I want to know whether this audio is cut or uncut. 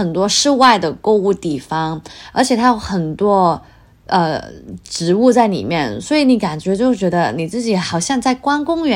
uncut